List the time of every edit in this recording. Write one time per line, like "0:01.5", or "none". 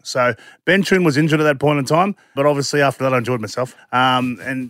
0:02.4
0:03.8